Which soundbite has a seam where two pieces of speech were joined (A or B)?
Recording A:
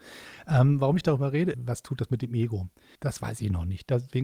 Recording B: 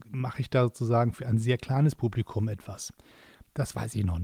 A